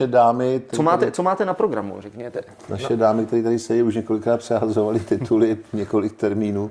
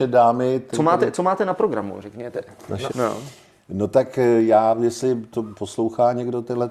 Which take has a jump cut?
second; 1 cut; at 2.9 s

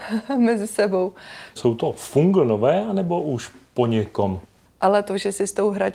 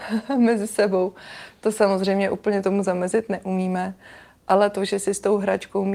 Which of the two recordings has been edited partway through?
first; 2 cuts; at 1.6 s, 4.7 s

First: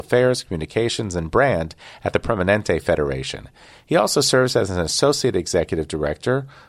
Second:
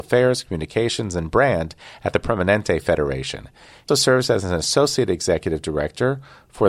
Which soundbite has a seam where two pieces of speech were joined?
second; 1 cut; at 3.9 s

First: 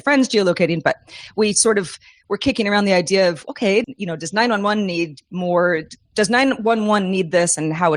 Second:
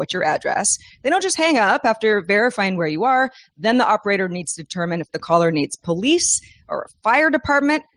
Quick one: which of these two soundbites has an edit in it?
first; 1 cut; at 3.8 s

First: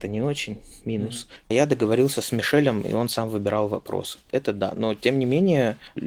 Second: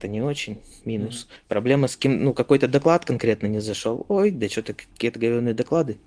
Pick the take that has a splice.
first; 2 cuts; at 1.4 s, 4.2 s

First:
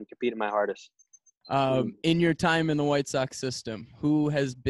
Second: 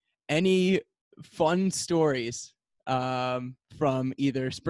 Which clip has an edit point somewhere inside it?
first; 1 cut; at 1.4 s

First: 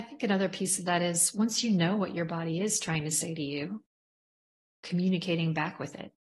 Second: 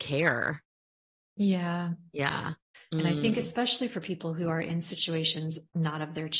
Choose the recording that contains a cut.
second; 1 cut; at 2.7 s

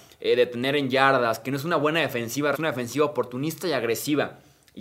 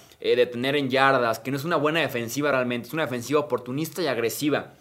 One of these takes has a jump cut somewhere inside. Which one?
first; 1 cut; at 2.5 s

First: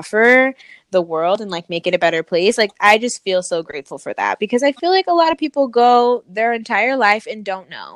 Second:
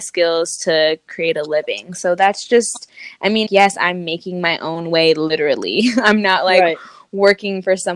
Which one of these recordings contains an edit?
second; 1 cut; at 3.5 s

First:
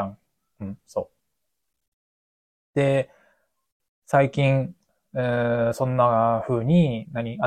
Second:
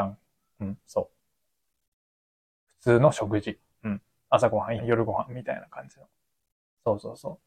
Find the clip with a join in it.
second; 2 cuts; at 2.7 s, 4.8 s

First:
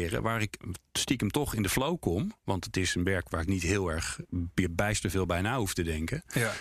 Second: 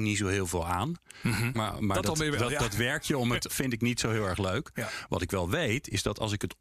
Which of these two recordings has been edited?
second; 2 cuts; at 1.5 s, 3.5 s

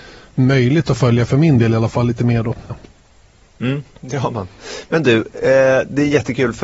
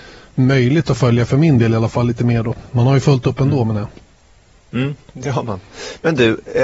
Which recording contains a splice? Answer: first; 1 cut; at 2.7 s

